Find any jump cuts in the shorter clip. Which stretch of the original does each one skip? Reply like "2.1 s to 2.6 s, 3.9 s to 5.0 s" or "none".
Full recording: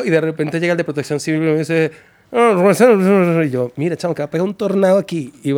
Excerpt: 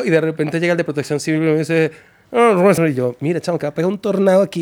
2.8 s to 3.3 s

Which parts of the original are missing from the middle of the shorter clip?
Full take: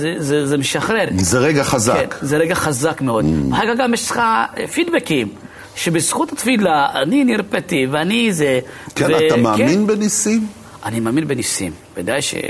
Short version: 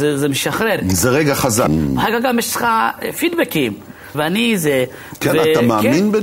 2.0 s to 3.2 s, 5.7 s to 7.9 s

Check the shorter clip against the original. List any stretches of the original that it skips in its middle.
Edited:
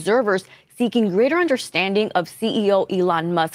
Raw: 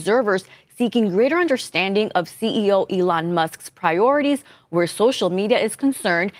none

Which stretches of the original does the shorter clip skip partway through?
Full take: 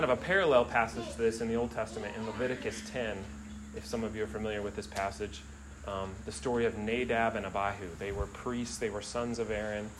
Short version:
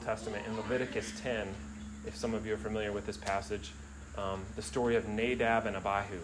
none

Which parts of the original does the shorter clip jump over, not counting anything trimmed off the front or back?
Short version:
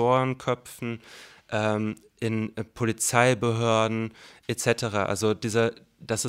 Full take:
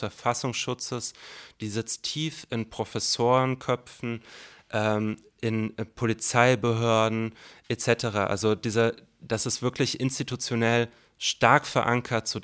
none

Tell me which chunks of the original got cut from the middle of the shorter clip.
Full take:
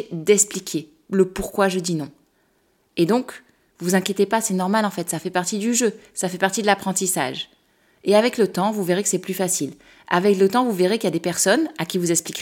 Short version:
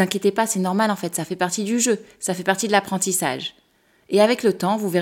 none

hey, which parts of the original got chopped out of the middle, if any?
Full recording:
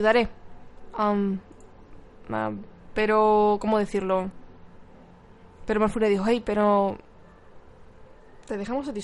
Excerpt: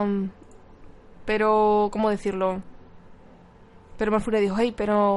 2.2 s to 2.8 s

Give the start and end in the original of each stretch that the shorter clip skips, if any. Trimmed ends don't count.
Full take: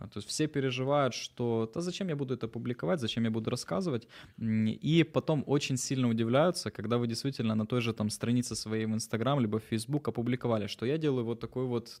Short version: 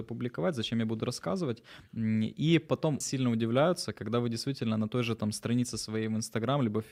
5.5 s to 5.8 s

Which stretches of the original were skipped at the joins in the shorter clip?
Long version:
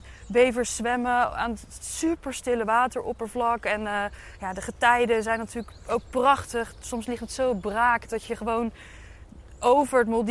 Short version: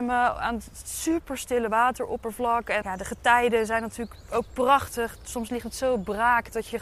3.8 s to 4.4 s

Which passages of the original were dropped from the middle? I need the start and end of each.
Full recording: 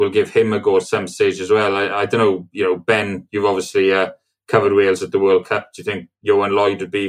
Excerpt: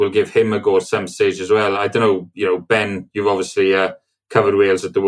1.7 s to 1.9 s

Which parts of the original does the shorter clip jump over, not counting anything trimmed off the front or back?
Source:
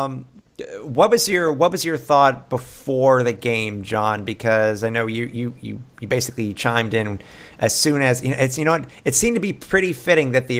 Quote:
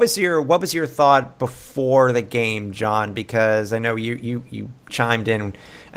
6.0 s to 6.5 s

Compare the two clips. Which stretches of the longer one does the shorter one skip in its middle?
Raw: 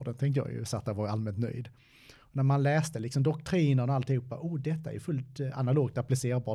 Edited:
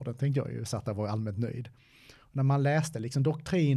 none

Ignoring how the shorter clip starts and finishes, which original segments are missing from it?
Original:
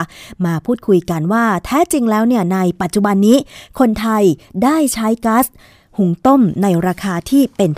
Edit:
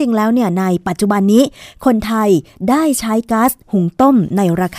5.6 s to 5.9 s

